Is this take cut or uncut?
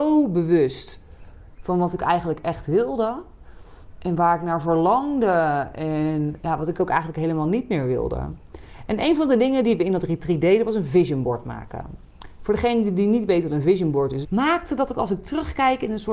cut